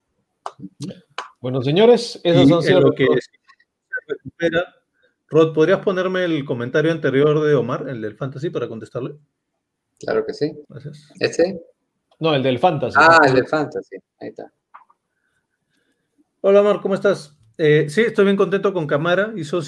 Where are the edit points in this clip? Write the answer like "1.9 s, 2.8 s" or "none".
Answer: 10.6 s